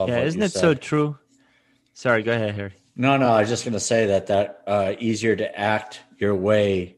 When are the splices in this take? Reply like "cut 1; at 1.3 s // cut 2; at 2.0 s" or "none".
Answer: none